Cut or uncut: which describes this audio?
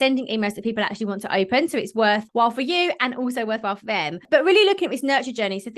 uncut